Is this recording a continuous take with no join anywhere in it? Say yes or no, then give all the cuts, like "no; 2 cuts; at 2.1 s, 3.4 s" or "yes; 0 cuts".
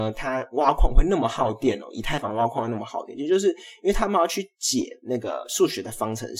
yes; 0 cuts